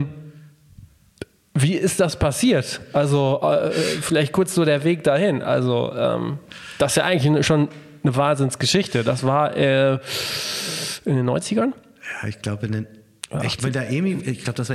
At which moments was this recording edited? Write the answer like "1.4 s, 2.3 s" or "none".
none